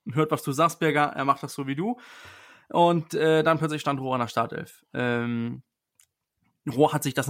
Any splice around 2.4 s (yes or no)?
no